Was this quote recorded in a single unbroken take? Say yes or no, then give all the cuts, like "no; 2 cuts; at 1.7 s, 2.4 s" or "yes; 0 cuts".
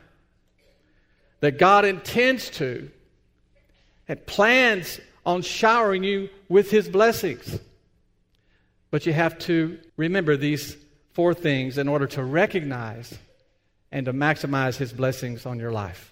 no; 1 cut; at 9.9 s